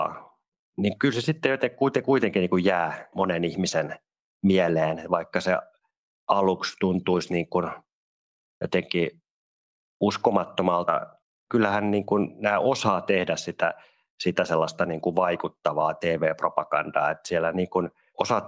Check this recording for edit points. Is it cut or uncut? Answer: cut